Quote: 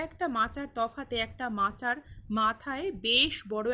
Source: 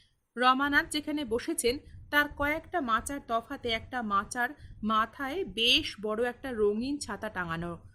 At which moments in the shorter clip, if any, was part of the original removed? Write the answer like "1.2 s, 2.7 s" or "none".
none